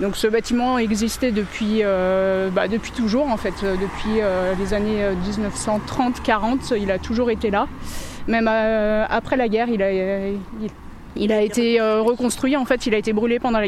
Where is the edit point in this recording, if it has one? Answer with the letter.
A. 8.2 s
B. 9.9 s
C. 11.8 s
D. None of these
D